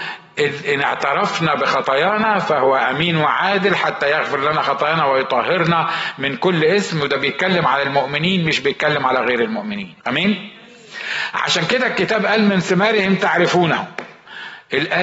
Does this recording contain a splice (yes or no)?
yes